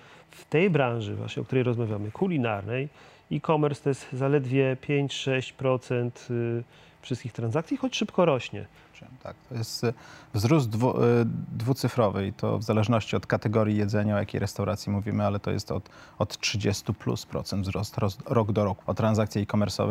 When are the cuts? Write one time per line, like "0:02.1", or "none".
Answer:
0:18.8